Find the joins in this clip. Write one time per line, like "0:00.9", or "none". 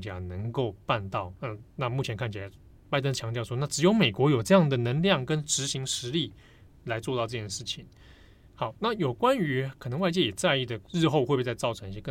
0:08.5
0:10.8

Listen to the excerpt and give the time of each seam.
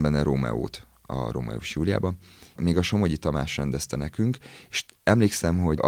0:02.6

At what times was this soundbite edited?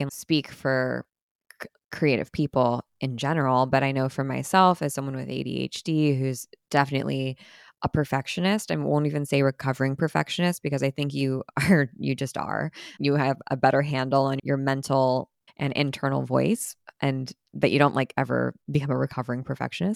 none

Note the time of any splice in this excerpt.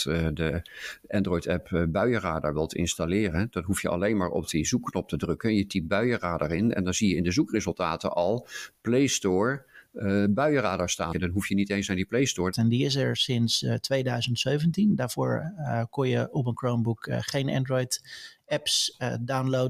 0:11.1
0:12.5

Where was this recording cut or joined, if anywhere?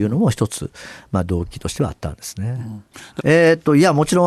0:03.2

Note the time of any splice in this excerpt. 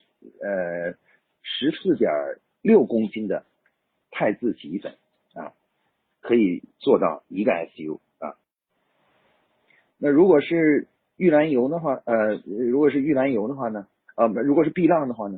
none

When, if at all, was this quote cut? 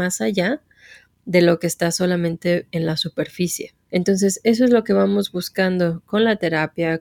0:03.9

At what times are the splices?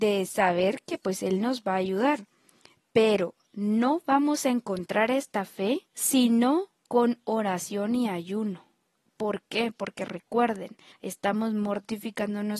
0:05.9
0:10.9

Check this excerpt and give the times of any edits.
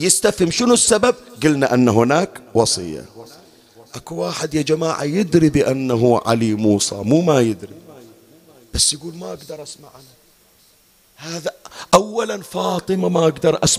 none

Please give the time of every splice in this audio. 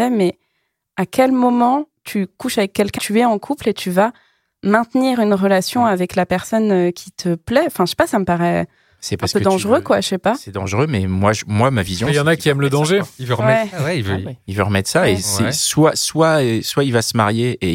0:03.0

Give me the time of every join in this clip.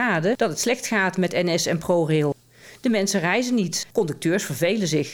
0:03.9

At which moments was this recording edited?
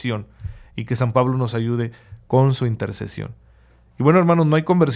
none

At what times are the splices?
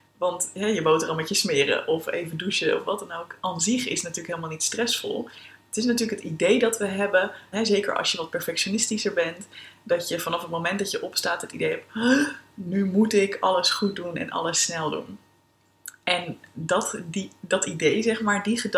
0:07.5

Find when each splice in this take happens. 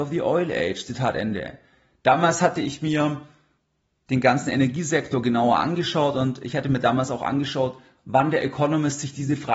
none

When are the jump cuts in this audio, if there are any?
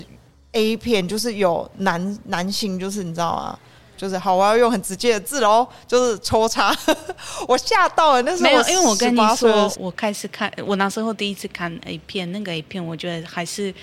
0:09.7

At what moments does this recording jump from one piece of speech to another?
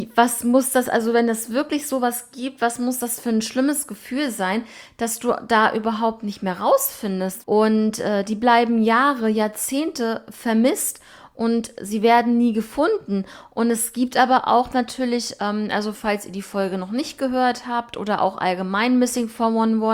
0:07.4

